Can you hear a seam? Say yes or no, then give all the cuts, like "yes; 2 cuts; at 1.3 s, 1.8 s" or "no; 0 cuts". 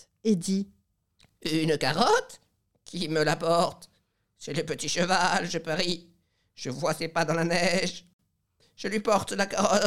yes; 1 cut; at 8.6 s